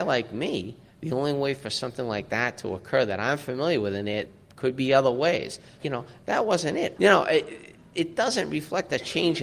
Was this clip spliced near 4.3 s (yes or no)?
yes